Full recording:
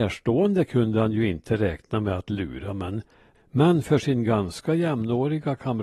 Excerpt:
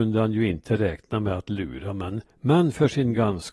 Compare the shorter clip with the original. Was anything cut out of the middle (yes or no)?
yes